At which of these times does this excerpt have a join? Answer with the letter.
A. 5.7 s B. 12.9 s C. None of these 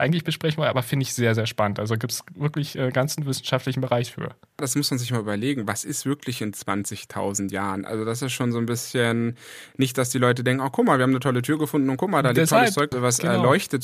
B